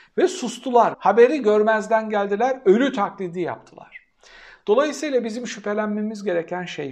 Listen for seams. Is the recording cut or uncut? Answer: cut